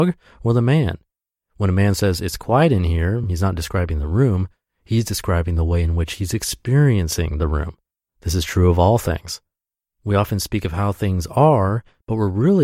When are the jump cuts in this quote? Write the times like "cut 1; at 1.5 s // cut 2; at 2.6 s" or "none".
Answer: none